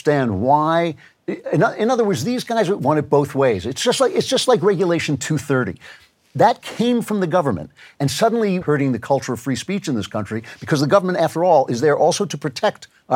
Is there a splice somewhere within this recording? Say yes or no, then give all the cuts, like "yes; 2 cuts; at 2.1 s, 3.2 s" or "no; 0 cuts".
yes; 1 cut; at 8.6 s